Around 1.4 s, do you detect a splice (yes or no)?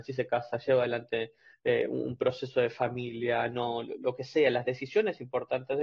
no